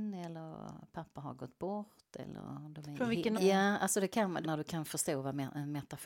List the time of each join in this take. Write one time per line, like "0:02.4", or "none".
0:03.3
0:04.4

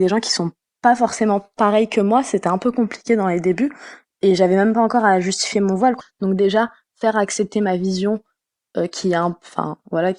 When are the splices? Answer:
0:06.0

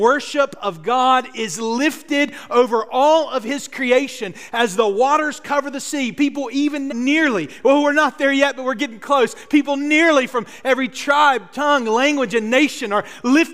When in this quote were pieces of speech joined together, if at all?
0:06.9

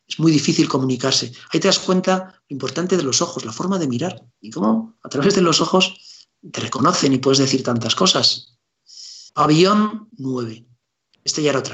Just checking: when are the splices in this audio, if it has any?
0:06.5
0:09.3

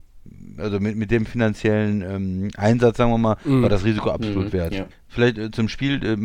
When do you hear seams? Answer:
0:04.9

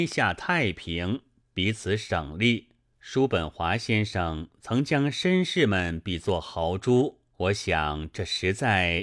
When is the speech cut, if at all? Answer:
0:02.9
0:07.3

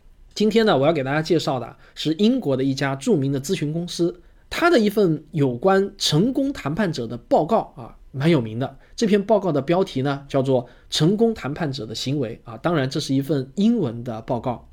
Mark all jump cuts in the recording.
0:04.4

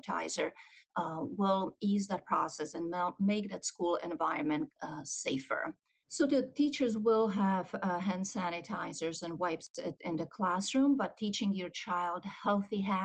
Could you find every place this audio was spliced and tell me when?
0:06.0

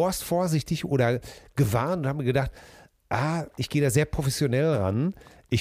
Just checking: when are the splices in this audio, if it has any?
none

